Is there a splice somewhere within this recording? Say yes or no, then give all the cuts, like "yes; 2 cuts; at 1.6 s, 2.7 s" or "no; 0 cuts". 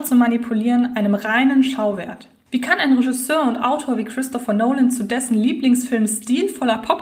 no; 0 cuts